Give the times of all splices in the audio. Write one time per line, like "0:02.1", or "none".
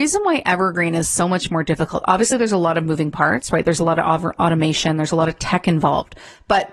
none